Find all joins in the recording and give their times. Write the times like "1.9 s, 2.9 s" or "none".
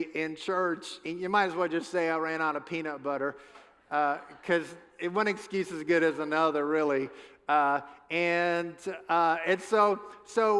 none